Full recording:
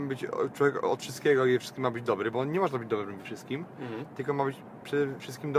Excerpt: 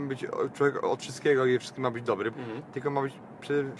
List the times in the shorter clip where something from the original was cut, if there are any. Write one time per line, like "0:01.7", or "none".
0:02.3